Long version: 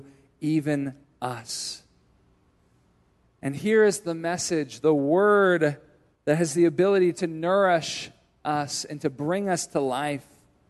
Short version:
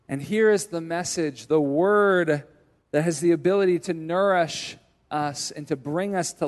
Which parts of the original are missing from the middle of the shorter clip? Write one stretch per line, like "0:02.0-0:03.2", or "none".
none

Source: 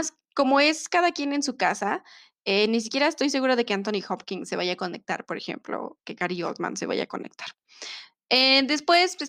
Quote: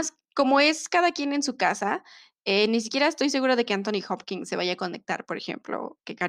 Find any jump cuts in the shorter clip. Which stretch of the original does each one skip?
none

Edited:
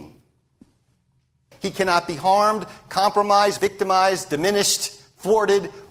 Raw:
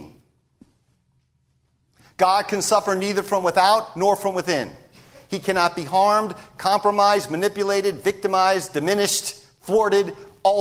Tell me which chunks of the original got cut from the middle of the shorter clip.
0:01.5-0:05.2
0:07.3-0:08.0

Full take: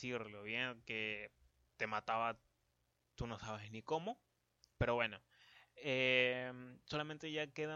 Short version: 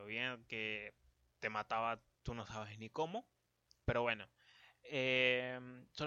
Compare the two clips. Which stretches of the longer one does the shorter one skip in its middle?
0:02.5-0:03.0

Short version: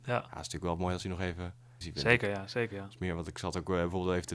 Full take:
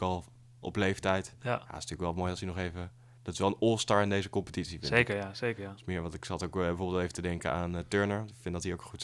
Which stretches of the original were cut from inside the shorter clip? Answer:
0:03.2-0:04.7

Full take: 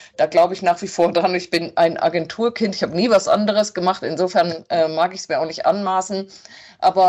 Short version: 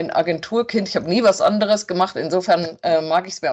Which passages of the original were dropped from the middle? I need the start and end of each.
none

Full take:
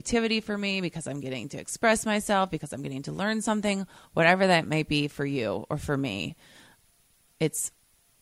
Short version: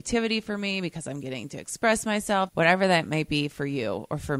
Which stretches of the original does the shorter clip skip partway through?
0:02.5-0:04.1

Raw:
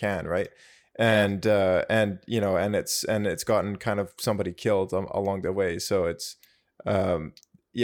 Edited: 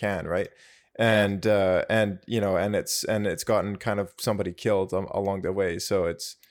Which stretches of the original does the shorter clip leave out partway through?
none

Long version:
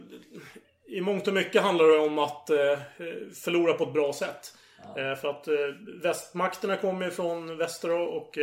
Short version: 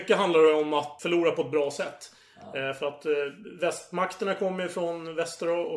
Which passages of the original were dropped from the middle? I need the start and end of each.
0:02.4-0:03.4

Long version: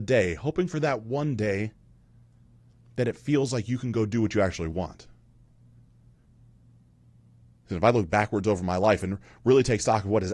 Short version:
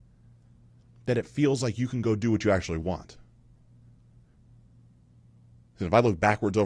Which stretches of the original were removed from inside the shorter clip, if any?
none

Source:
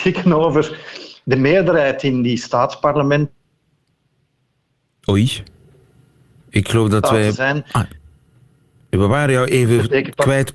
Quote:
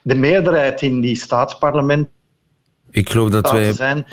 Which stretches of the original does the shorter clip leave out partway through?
0:04.1-0:06.4

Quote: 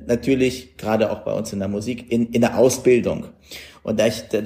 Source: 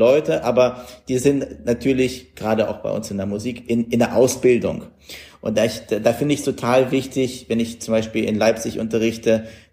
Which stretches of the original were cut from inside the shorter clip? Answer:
none

